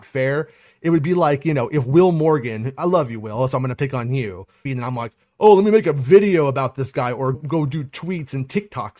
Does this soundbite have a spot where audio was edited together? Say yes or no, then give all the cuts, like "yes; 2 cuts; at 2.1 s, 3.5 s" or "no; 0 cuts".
yes; 2 cuts; at 4.7 s, 7.3 s